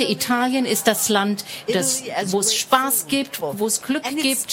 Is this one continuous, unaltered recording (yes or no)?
no